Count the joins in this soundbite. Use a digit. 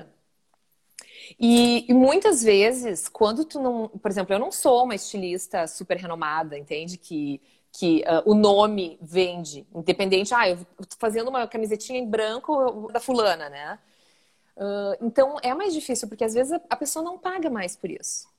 1